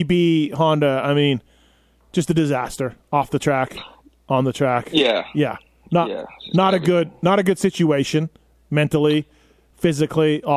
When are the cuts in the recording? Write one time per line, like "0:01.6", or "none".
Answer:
none

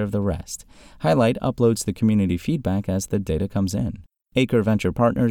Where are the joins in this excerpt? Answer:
none

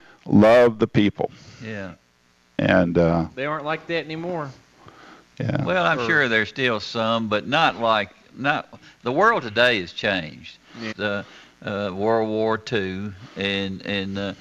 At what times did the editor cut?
0:10.9

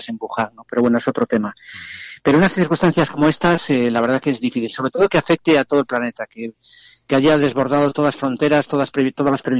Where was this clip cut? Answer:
none

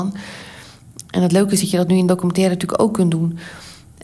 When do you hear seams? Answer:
none

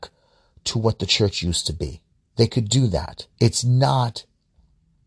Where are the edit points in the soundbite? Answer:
0:03.3

